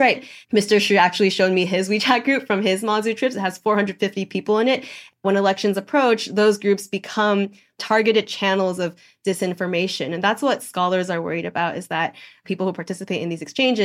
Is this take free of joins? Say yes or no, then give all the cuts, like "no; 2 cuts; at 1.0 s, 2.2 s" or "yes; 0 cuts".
yes; 0 cuts